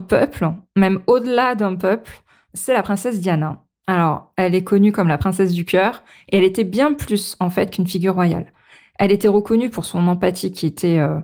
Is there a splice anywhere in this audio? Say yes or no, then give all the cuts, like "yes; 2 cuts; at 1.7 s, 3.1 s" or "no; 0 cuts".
no; 0 cuts